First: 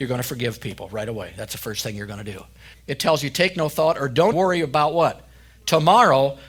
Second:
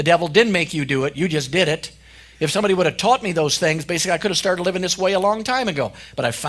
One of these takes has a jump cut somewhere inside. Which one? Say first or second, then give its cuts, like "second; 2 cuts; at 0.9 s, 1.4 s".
first; 2 cuts; at 2.7 s, 4.3 s